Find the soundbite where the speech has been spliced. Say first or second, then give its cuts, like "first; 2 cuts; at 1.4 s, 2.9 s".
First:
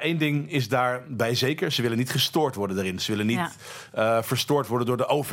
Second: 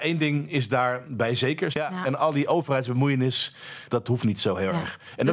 second; 2 cuts; at 1.7 s, 3.9 s